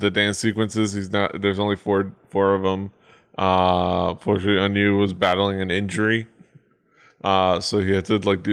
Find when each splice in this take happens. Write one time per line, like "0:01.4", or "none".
none